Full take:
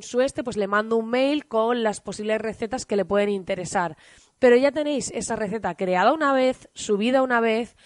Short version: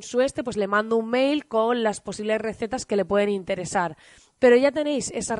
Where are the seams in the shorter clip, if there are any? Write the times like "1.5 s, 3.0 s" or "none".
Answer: none